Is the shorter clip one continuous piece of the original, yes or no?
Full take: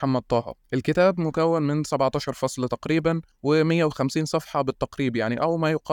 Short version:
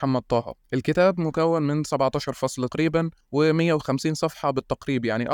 no